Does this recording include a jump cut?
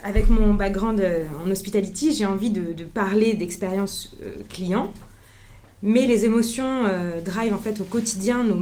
no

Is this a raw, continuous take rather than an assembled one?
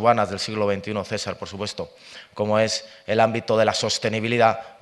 yes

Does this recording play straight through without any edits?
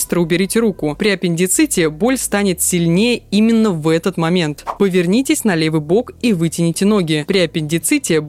yes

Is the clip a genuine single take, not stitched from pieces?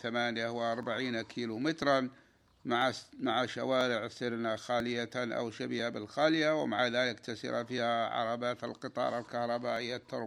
yes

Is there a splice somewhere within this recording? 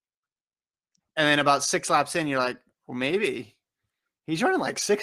yes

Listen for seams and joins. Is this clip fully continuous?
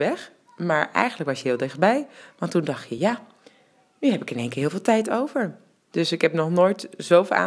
yes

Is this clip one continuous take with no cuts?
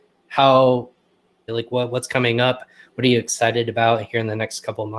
no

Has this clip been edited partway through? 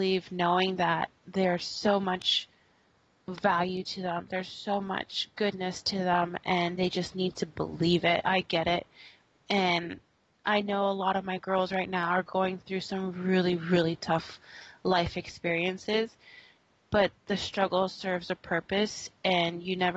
yes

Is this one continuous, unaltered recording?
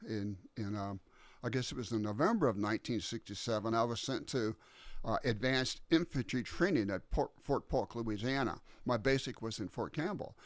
yes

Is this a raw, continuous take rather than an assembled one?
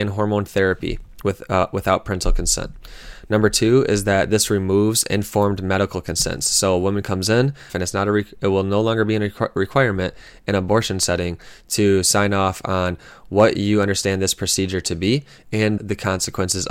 no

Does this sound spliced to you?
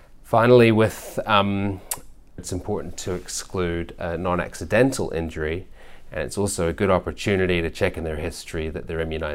yes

